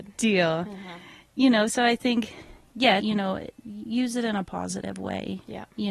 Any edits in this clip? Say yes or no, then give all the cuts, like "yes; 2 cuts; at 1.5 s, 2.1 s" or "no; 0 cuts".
yes; 1 cut; at 3.0 s